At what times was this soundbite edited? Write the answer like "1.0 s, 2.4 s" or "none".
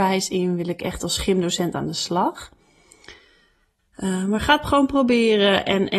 3.8 s